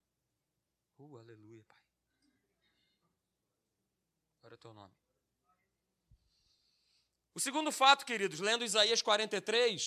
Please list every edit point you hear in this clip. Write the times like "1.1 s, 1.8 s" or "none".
none